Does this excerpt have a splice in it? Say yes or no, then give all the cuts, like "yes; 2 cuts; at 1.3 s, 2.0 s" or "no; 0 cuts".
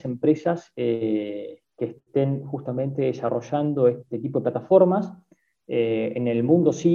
no; 0 cuts